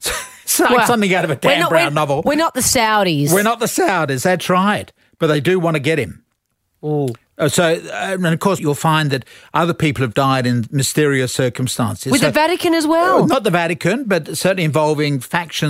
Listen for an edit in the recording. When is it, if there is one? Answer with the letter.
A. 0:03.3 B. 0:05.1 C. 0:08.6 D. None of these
C